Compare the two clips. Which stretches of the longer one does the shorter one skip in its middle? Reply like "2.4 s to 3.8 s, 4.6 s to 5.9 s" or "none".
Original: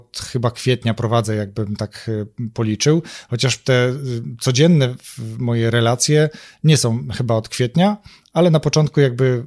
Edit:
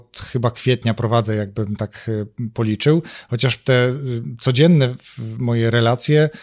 none